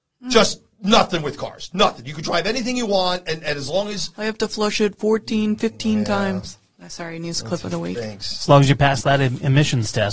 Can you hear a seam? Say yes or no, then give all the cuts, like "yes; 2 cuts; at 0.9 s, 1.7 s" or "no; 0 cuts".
no; 0 cuts